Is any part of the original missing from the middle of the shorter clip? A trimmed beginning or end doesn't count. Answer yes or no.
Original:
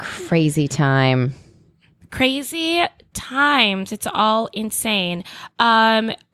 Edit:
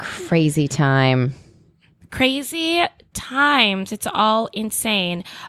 no